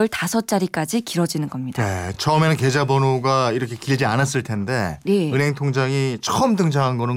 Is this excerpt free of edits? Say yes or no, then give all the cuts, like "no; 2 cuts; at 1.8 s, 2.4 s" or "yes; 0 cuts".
yes; 0 cuts